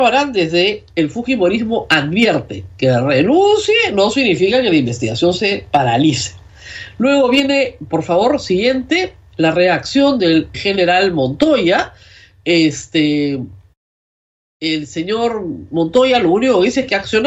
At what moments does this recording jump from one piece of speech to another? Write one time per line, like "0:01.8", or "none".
0:10.5